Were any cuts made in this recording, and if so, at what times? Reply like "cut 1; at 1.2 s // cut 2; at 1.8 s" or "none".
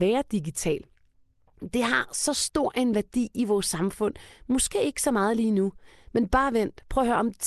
none